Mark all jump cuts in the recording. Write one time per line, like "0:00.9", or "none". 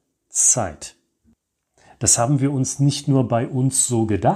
none

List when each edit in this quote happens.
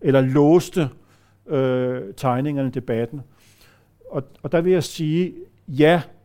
none

